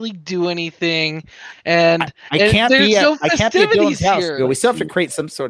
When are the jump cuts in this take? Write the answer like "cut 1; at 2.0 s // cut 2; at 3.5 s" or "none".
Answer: cut 1; at 4.4 s